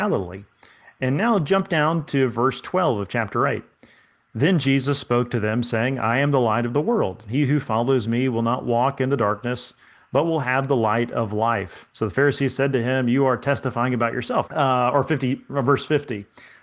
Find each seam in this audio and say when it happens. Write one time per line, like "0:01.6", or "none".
0:11.9
0:14.5

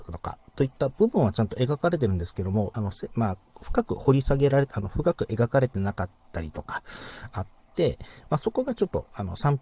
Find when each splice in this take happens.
0:02.7

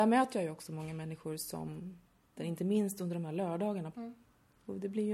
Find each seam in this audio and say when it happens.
0:02.4
0:03.9

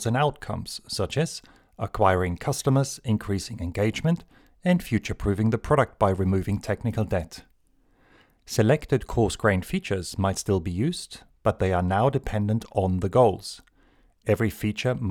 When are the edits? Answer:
none

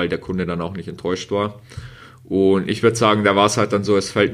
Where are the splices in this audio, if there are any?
none

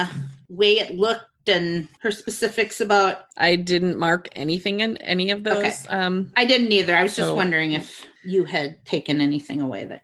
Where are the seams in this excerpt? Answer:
none

